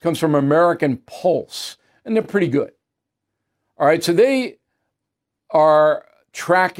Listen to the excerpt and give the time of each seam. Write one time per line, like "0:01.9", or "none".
none